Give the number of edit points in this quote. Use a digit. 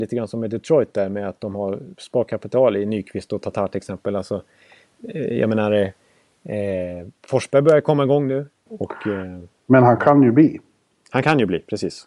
1